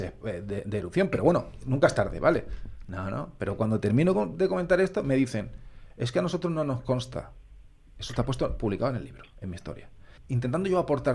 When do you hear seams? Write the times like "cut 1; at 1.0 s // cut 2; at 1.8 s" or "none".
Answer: cut 1; at 10.2 s